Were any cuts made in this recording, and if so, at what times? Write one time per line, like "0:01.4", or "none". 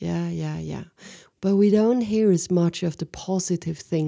0:01.3